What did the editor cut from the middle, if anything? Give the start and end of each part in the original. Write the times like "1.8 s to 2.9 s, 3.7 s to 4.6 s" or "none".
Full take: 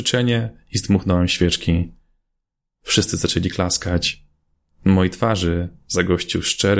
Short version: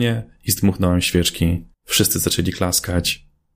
2.0 s to 2.7 s

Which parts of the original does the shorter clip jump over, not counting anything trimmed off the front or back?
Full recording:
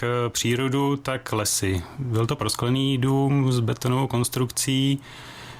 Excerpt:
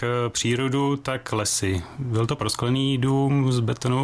none

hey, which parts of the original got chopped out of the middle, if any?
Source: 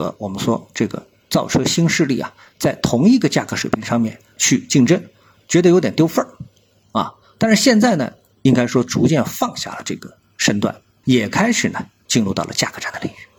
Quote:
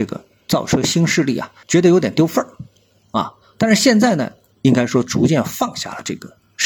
2.4 s to 5.4 s

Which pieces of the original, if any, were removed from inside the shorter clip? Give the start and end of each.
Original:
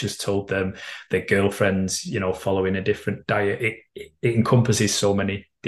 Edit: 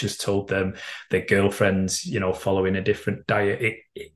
none

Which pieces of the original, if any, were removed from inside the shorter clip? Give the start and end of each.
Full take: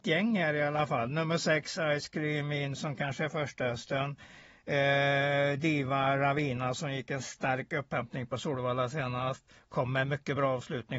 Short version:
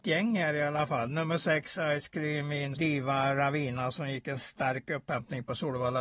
2.8 s to 5.6 s

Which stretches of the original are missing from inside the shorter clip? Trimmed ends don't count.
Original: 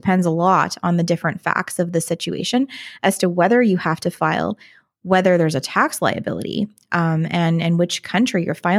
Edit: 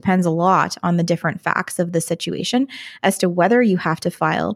none

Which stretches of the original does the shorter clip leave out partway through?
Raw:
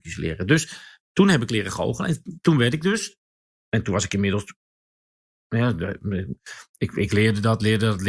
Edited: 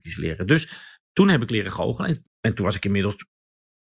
2.2 s to 3.5 s

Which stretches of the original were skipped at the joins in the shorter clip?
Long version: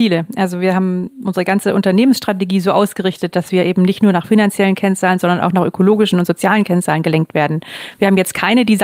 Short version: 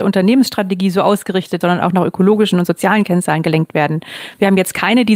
3.3 s to 5.2 s

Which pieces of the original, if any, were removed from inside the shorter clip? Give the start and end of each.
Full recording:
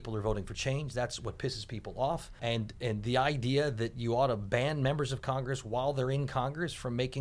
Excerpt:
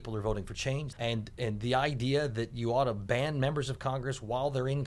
0.9 s to 2.4 s

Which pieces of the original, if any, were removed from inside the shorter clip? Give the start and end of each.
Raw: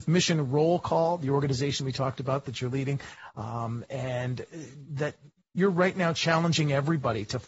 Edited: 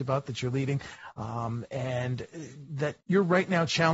5.2 s to 5.5 s

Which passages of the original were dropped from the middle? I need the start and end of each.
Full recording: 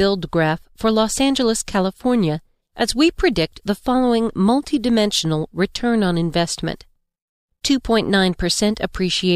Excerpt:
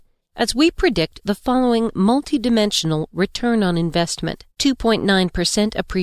6.9 s to 7.6 s

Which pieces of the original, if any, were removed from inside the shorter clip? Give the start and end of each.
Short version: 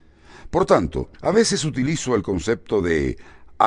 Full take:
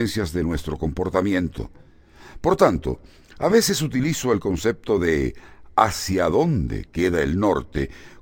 3.0 s to 3.3 s

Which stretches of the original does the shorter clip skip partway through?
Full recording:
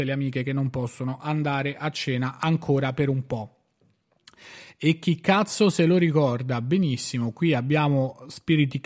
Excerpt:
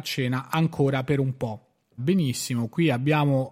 3.9 s to 6.6 s

